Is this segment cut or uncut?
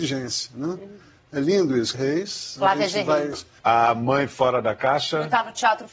cut